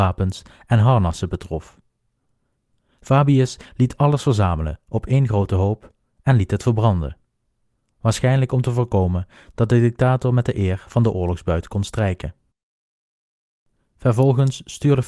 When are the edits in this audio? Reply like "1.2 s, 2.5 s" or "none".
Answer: none